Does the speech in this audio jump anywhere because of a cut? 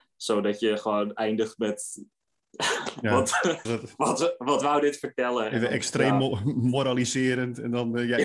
yes; 1 cut; at 3.7 s

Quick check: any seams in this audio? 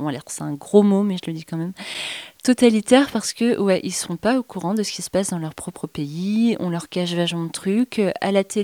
no; 0 cuts

